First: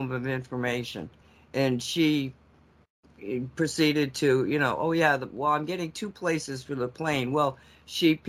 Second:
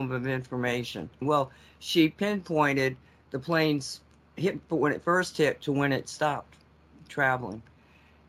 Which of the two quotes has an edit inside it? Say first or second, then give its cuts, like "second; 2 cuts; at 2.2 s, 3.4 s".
second; 1 cut; at 1.2 s